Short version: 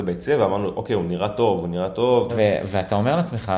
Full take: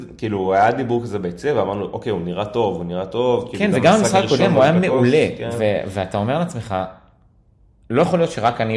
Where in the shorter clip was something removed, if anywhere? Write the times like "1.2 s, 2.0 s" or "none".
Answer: 2.3 s